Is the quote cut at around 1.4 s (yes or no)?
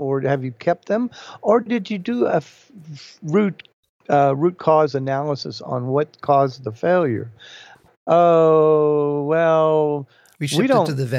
no